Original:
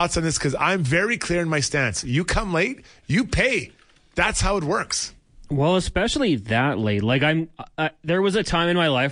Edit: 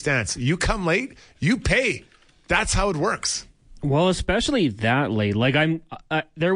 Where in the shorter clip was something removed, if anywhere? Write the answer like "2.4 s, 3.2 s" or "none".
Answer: none